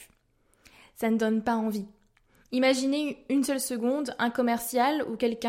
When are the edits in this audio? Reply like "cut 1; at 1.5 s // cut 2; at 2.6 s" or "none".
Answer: none